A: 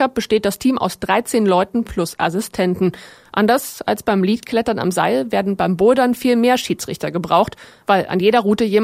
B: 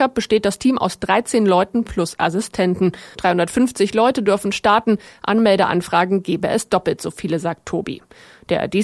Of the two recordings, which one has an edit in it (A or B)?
B